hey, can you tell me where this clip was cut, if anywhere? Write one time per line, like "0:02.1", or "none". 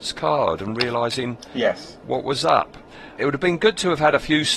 0:03.2